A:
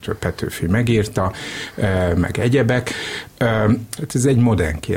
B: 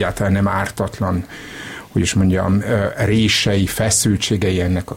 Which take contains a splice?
A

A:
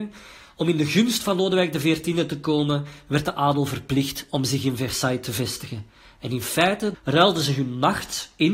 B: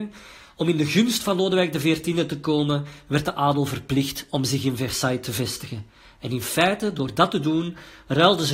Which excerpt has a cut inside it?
A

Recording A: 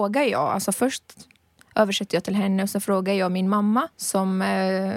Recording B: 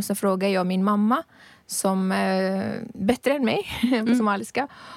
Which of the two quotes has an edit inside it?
A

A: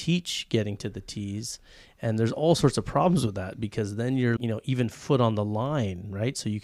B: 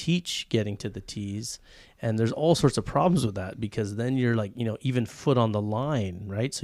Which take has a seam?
A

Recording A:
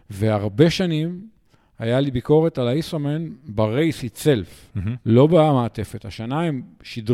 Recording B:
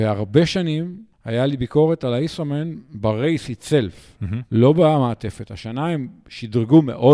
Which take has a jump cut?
B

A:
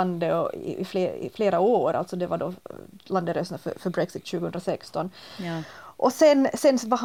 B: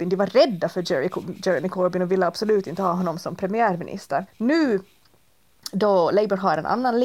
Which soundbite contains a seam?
B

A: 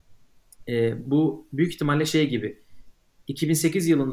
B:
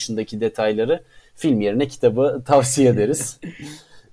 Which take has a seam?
A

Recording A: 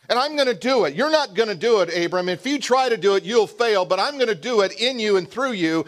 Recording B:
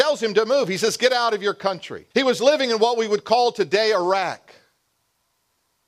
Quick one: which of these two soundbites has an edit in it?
B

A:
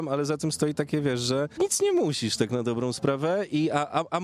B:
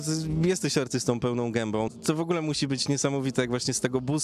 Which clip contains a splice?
B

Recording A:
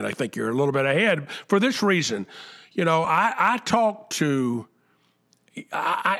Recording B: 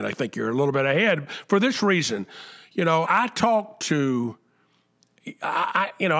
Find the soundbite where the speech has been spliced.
B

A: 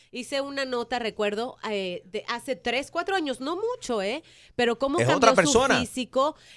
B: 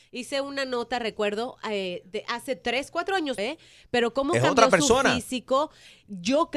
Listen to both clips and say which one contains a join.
B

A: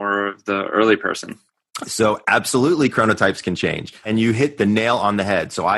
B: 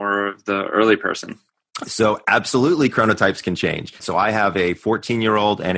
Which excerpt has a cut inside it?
B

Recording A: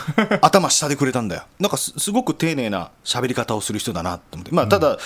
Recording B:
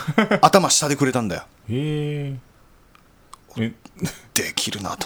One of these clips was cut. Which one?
A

